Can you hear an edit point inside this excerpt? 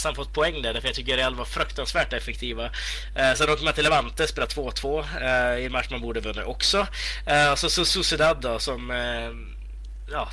no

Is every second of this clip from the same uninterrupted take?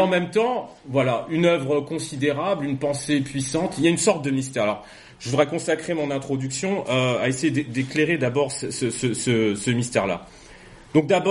yes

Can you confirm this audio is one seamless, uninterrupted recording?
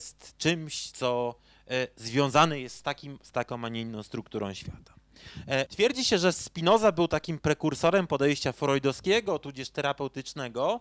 no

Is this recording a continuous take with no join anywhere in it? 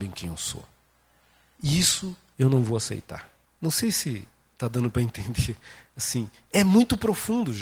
no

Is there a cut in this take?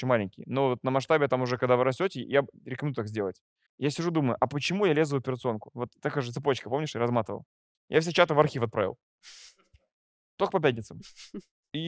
yes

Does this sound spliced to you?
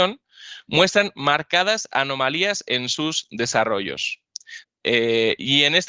yes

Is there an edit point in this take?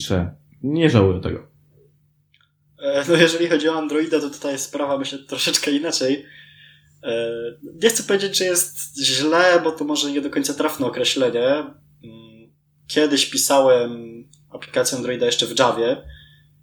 no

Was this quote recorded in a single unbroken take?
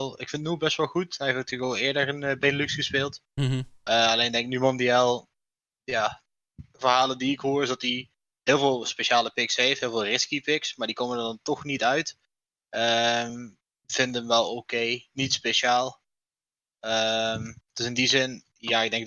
yes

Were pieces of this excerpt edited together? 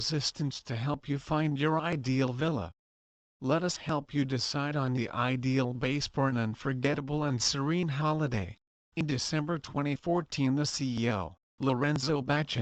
yes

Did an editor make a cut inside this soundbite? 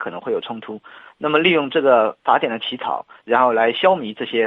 no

